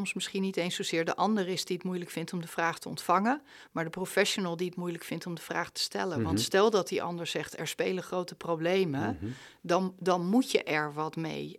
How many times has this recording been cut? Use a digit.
0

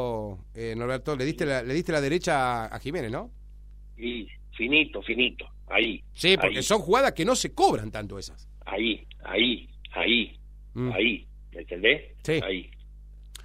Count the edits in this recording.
0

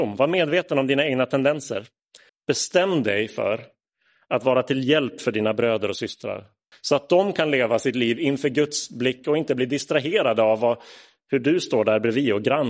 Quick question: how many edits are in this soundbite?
2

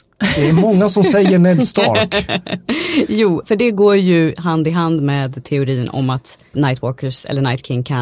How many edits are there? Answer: 2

